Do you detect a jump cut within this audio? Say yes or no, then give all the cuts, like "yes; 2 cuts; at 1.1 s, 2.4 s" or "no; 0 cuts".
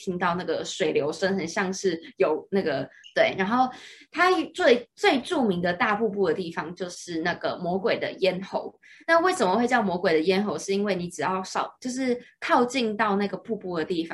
yes; 1 cut; at 3.0 s